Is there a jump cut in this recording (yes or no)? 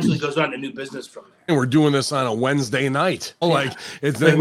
yes